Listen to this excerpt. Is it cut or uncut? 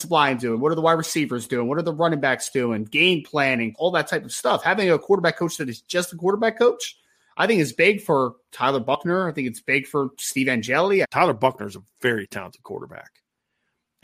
cut